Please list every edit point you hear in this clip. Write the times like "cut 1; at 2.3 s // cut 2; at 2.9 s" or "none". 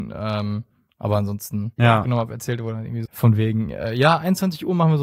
cut 1; at 1.8 s // cut 2; at 3.1 s